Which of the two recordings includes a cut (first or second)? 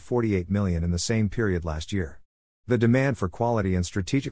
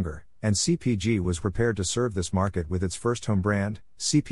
second